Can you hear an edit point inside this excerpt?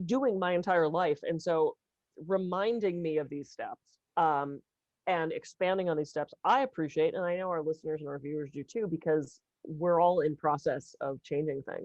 yes; 1 cut; at 4.1 s

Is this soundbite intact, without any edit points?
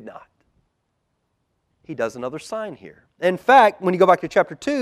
no; 1 cut; at 1.7 s

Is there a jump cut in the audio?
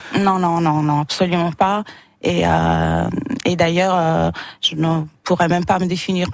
no; 0 cuts

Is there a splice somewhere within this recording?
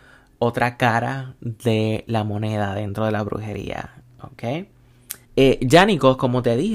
yes; 1 cut; at 5.2 s

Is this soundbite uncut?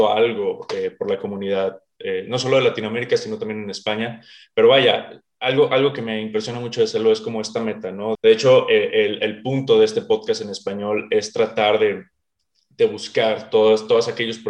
no; 1 cut; at 8.1 s

